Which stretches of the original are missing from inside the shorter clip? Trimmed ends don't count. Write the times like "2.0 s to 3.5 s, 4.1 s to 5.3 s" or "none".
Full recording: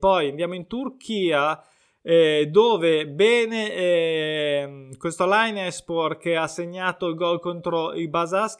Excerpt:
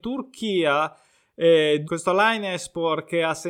2.5 s to 5.0 s